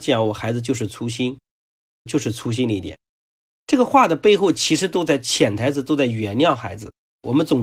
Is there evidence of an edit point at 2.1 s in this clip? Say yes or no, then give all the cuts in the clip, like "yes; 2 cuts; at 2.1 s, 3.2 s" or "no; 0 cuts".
yes; 1 cut; at 2.1 s